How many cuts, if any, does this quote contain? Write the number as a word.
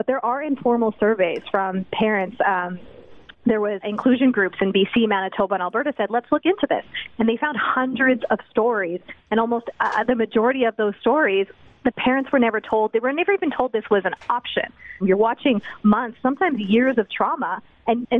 two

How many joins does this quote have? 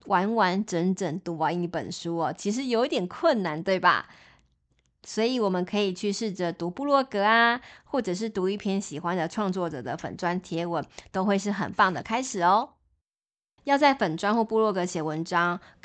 one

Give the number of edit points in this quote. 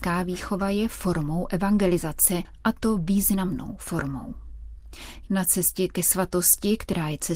one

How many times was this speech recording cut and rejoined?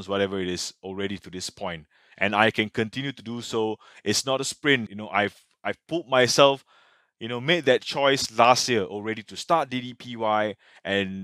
one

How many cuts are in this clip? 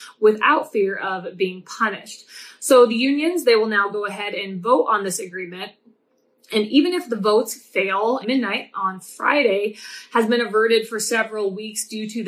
one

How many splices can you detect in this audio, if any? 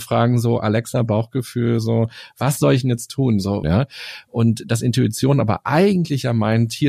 one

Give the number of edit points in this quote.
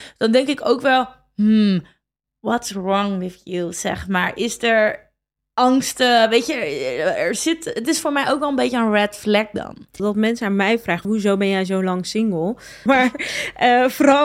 three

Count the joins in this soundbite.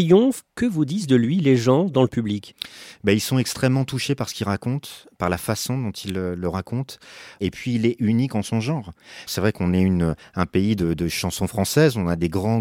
one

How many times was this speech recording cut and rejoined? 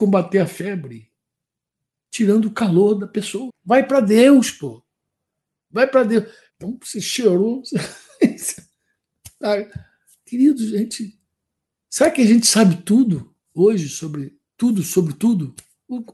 two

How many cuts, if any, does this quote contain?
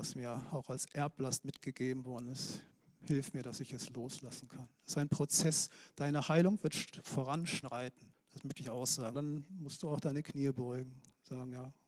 two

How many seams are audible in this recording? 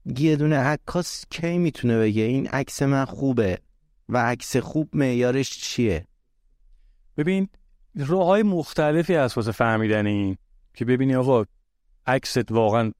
zero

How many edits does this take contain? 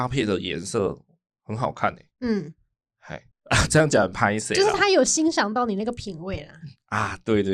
one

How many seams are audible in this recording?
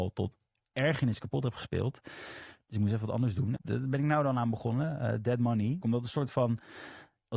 two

